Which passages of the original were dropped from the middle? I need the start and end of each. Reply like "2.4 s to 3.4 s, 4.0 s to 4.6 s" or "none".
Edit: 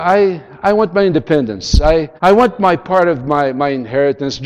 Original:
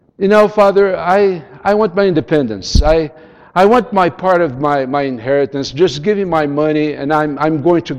3.2 s to 3.5 s